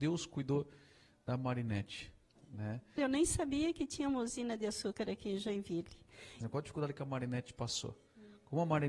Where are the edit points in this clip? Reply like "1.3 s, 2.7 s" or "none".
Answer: 3.0 s, 6.4 s